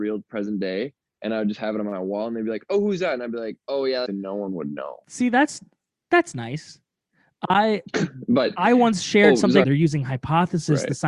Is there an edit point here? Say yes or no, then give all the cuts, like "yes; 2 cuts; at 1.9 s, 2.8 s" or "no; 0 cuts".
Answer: yes; 2 cuts; at 4.1 s, 9.6 s